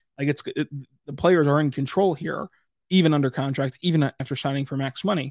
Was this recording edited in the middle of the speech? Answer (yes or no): yes